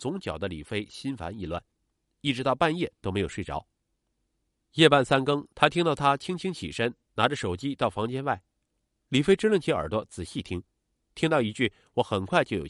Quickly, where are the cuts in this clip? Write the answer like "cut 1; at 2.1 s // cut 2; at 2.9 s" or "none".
cut 1; at 5.5 s